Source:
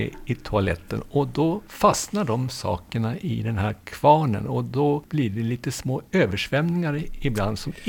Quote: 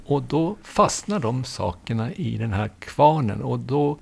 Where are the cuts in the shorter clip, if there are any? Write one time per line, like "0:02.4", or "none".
none

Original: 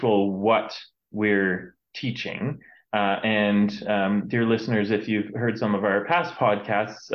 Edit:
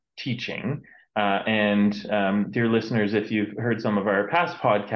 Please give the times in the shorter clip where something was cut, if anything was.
none

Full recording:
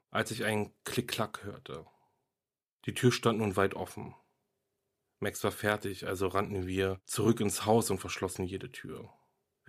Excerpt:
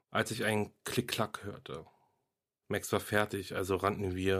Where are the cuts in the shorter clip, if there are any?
0:02.6

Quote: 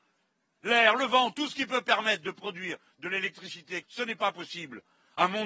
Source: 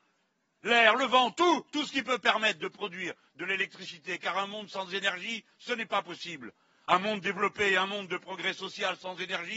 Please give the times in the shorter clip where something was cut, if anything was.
0:01.3
0:03.8

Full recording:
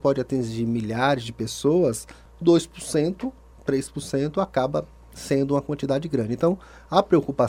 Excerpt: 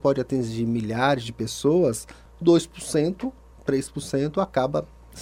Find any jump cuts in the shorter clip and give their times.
none

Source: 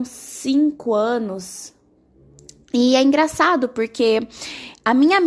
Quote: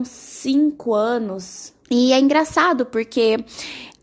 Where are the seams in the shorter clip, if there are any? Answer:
0:01.8

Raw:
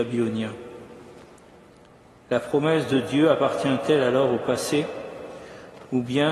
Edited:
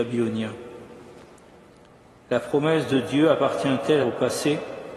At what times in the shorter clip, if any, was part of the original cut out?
0:04.0

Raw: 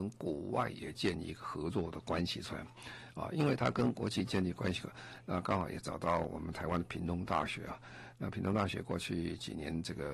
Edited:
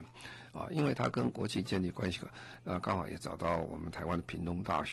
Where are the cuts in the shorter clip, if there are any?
none

